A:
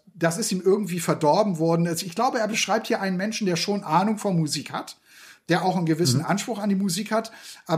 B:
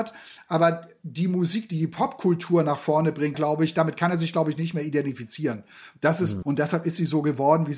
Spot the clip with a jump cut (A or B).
B